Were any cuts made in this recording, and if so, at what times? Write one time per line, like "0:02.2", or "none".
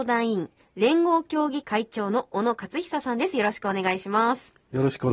0:01.6